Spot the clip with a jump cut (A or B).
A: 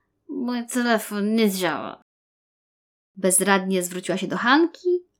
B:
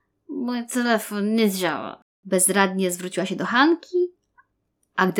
B